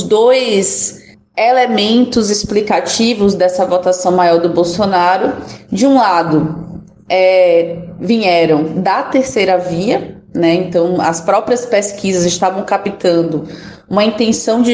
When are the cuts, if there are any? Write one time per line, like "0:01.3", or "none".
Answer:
none